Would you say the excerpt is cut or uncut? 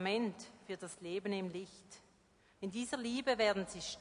cut